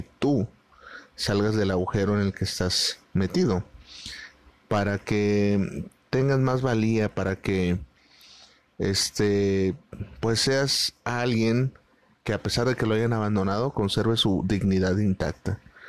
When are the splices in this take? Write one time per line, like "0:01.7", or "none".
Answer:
none